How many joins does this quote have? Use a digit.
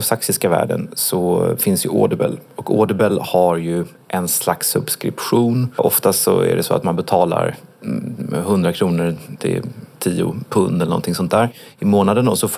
0